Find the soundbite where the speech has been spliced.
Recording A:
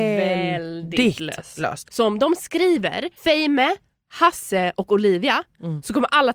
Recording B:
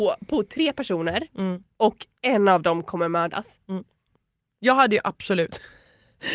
A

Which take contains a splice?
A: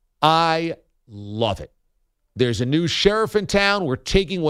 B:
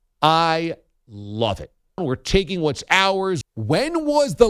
B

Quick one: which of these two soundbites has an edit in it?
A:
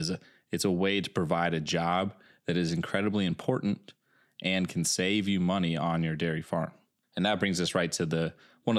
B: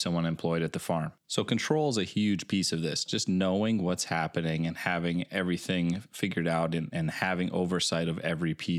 B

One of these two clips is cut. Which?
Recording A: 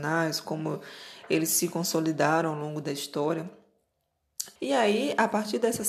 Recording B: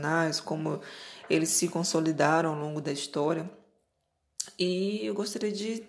A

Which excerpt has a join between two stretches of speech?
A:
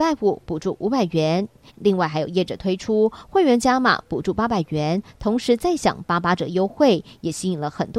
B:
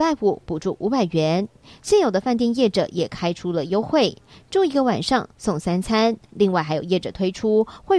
A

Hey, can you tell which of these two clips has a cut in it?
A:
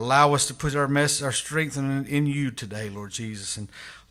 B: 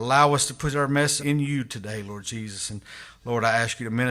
B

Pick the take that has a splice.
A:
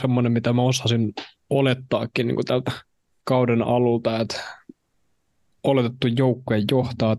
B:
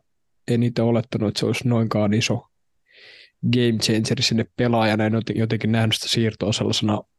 A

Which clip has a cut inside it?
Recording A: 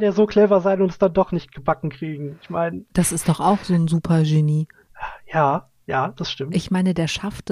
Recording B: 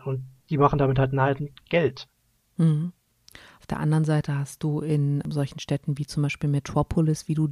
A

